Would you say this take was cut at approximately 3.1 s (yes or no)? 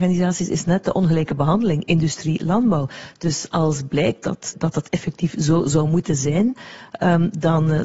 no